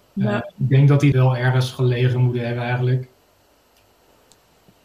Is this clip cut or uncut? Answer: cut